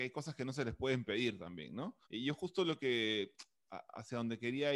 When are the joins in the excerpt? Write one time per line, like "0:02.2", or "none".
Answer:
0:02.0